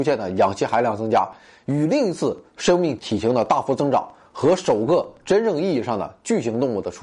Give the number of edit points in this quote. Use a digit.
1